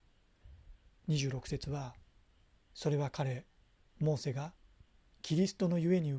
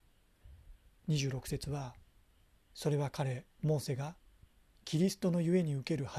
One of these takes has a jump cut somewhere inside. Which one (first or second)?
second